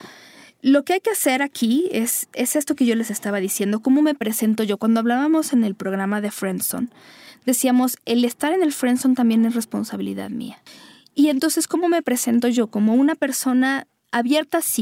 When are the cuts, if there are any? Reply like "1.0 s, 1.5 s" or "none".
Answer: none